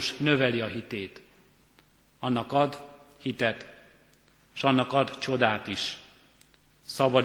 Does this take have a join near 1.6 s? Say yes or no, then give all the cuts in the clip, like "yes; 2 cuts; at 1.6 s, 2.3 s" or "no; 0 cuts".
no; 0 cuts